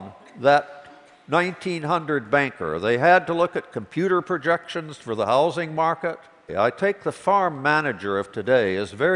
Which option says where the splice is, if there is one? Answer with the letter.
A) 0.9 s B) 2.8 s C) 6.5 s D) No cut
C